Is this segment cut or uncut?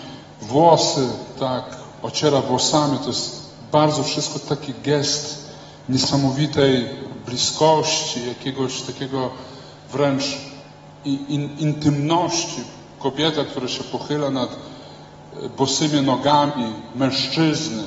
uncut